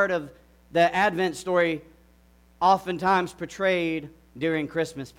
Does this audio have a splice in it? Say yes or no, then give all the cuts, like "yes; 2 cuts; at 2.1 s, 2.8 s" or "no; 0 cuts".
no; 0 cuts